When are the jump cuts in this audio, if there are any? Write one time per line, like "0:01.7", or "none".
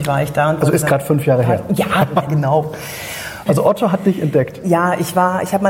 0:02.3
0:03.5